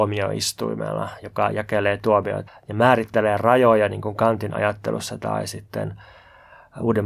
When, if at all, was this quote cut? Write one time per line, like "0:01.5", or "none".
0:02.5

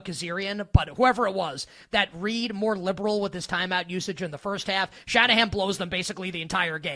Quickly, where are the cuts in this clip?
none

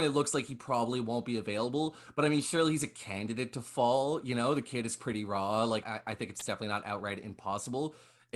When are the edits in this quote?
0:05.8

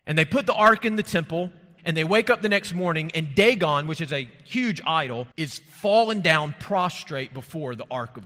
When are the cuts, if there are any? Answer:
0:01.8
0:05.3

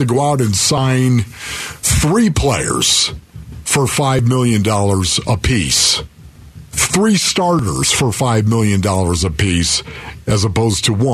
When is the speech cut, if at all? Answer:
none

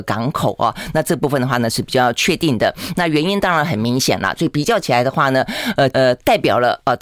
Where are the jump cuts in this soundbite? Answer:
0:04.4
0:05.9

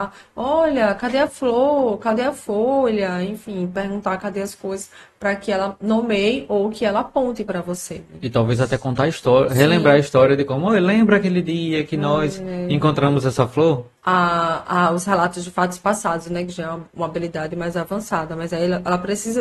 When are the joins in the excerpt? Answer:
0:14.0

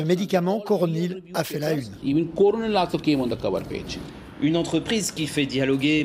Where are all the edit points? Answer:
none

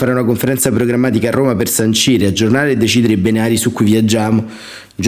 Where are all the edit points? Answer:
none

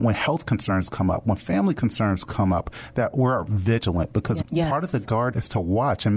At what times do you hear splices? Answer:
0:04.4

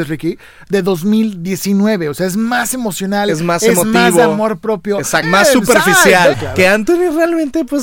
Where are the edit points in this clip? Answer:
0:05.2
0:06.3

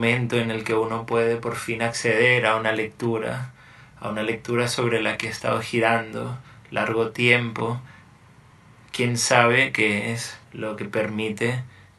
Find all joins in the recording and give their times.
0:10.4

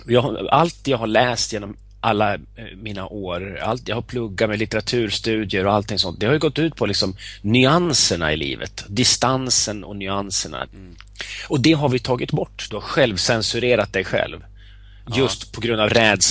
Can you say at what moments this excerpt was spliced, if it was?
0:10.7
0:12.7

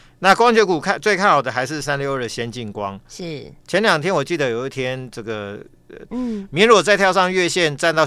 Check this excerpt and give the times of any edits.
0:01.8
0:06.1

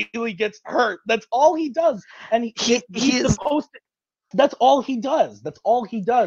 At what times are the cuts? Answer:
0:04.3

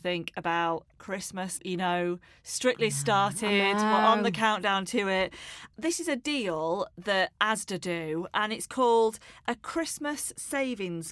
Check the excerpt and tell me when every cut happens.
0:01.6

